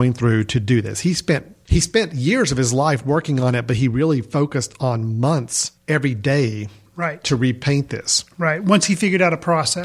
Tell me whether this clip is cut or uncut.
uncut